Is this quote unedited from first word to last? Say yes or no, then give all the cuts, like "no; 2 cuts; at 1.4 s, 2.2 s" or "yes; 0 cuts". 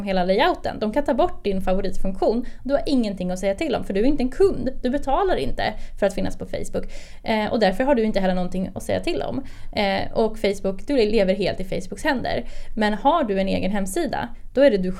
yes; 0 cuts